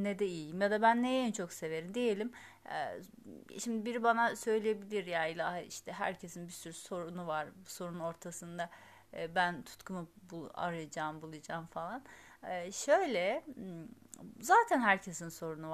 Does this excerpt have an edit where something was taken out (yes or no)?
no